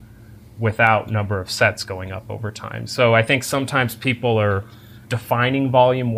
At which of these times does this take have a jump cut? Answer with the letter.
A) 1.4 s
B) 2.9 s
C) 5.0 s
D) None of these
C